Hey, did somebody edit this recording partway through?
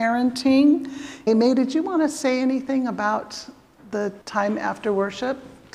yes; 2 cuts; at 1.3 s, 4.2 s

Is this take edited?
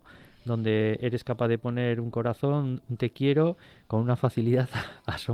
no; 0 cuts

